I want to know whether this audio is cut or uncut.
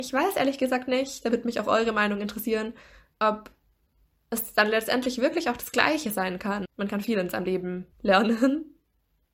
cut